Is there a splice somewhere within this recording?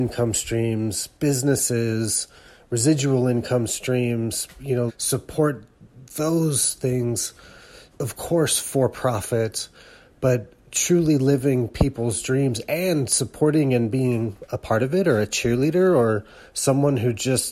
yes; 2 cuts; at 4.9 s, 7.9 s

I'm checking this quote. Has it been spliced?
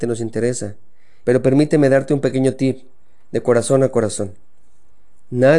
yes; 1 cut; at 1.2 s

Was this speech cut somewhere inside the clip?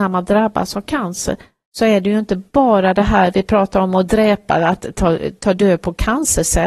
no; 0 cuts

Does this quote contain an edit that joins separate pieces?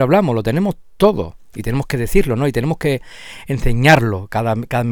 no; 0 cuts

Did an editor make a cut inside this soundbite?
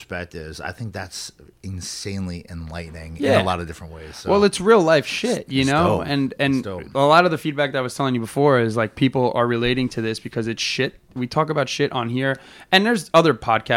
no; 0 cuts

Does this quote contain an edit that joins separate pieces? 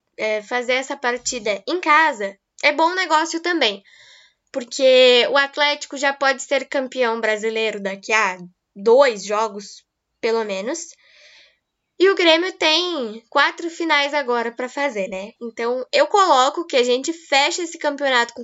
no; 0 cuts

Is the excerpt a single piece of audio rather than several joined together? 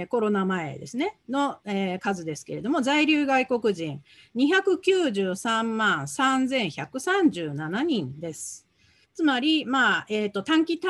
no; 1 cut; at 9.0 s

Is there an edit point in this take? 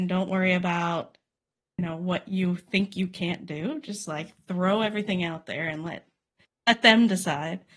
no; 0 cuts

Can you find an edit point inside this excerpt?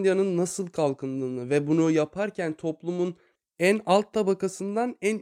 no; 0 cuts

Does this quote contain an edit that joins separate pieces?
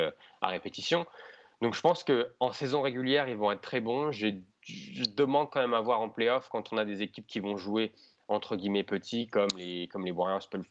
no; 0 cuts

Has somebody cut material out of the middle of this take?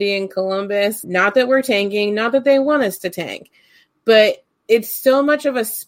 yes; 1 cut; at 1.0 s

